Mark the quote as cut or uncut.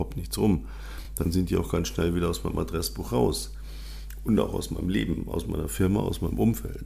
uncut